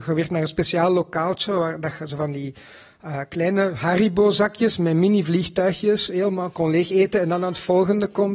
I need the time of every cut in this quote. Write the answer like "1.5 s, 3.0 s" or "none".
none